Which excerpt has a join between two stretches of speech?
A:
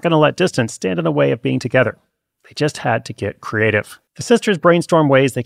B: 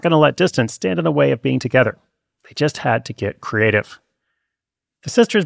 A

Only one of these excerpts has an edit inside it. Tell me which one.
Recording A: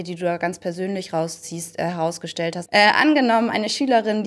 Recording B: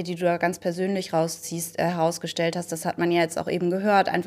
A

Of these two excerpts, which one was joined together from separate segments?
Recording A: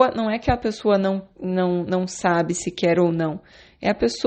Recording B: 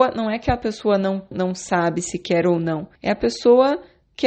B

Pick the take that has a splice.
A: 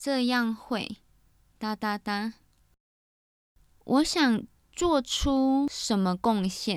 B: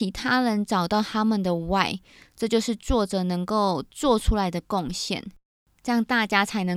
B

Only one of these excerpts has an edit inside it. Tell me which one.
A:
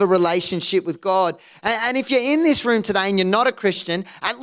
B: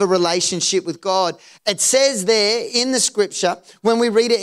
B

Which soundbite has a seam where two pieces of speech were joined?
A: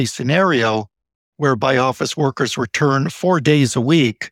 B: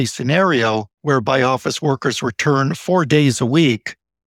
B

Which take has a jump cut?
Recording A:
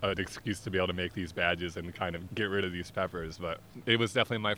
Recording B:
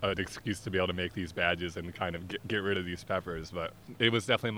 A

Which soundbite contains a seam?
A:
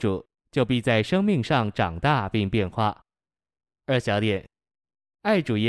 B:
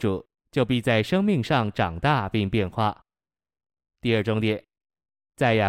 A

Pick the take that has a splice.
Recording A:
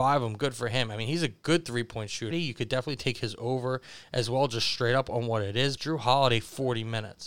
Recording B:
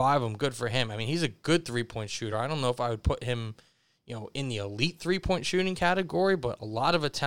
A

